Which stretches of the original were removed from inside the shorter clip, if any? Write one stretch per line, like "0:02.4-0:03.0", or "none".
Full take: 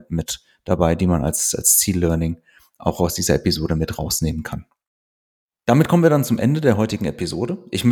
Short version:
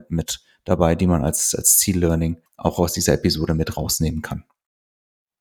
0:02.5-0:02.7